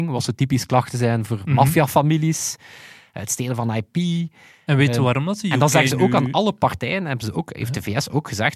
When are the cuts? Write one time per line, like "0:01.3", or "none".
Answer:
none

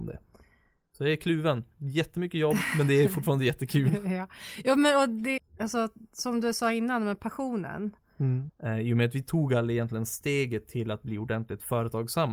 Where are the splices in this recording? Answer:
0:05.4
0:08.5

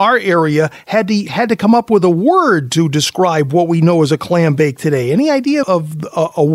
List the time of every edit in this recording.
0:05.6

